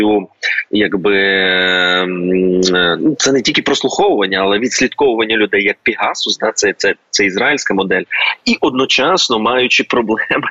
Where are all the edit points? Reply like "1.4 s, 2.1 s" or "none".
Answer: none